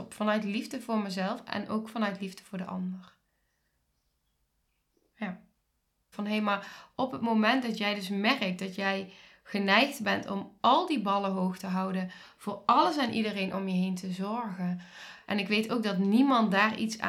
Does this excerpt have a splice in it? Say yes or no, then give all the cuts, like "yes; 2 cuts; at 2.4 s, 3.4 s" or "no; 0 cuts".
yes; 2 cuts; at 6.1 s, 15.2 s